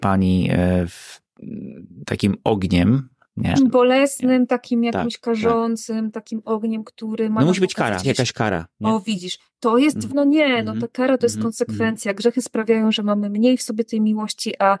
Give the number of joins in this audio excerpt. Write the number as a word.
three